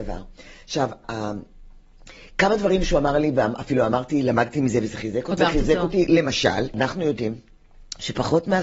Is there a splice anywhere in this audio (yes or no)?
yes